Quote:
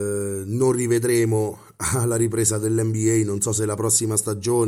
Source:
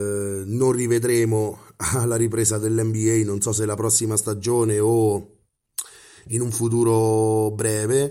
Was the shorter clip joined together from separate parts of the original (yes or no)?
no